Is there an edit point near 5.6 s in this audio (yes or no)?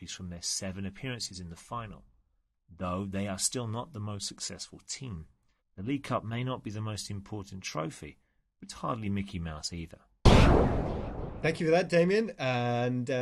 yes